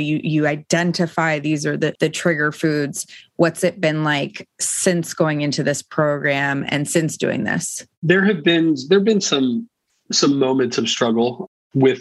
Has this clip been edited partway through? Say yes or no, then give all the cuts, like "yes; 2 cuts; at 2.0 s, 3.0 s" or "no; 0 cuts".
no; 0 cuts